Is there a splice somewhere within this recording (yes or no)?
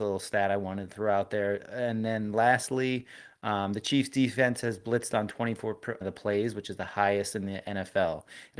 yes